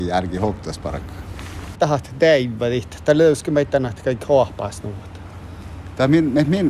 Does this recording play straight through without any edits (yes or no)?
no